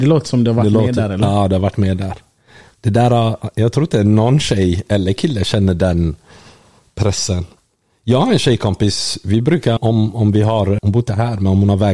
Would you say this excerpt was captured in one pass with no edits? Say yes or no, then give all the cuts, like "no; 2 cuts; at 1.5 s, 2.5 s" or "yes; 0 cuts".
no; 2 cuts; at 9.8 s, 10.8 s